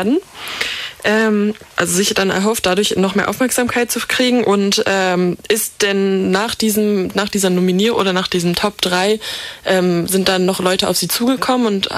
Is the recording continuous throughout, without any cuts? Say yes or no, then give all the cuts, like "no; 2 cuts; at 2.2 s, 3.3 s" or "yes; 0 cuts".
no; 1 cut; at 1.7 s